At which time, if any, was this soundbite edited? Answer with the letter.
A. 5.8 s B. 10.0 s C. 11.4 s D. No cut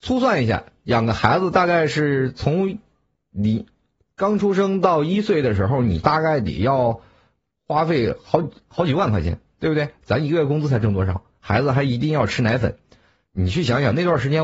D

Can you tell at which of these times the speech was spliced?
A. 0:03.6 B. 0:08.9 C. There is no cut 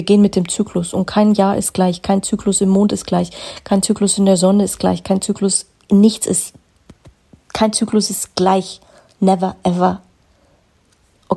C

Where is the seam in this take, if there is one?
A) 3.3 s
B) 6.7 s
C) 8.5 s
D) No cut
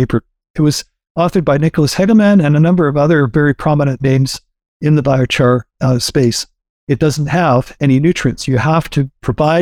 B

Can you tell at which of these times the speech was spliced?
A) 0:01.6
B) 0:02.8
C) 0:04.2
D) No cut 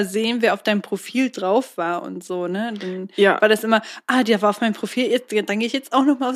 D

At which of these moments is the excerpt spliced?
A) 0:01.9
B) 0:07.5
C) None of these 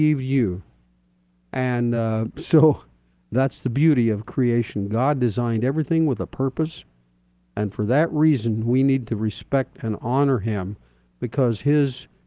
C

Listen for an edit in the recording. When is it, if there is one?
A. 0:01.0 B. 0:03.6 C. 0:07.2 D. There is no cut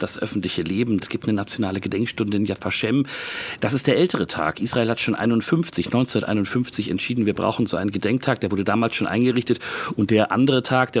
A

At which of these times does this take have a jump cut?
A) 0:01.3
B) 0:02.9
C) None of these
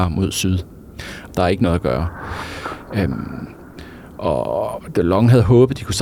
A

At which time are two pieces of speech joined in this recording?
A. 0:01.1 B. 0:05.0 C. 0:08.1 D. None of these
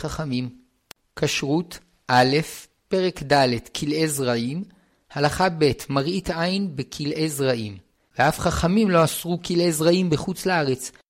C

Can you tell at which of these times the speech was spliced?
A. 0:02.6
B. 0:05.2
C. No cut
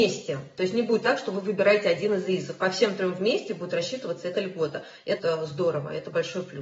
B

